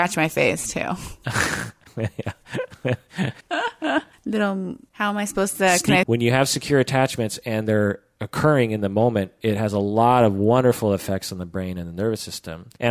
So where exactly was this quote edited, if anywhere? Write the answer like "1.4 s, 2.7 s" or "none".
6.0 s